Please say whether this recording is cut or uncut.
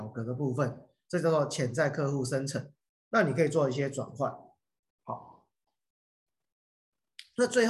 cut